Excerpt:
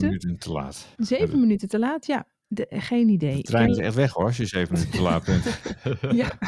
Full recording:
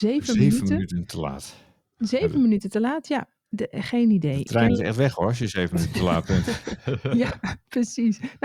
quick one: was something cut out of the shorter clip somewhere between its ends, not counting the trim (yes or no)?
yes